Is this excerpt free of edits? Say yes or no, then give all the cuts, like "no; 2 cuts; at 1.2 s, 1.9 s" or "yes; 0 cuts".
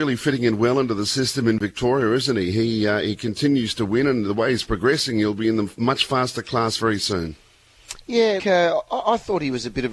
no; 1 cut; at 8.4 s